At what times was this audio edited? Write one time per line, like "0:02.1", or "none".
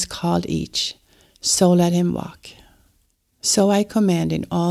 none